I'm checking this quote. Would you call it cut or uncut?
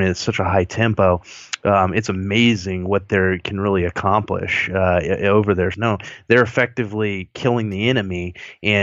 cut